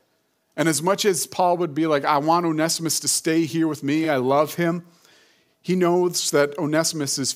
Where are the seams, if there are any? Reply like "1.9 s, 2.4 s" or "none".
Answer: none